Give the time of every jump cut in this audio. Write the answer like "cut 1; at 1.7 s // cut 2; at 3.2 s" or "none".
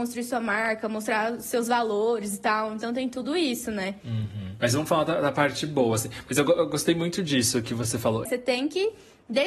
cut 1; at 8.3 s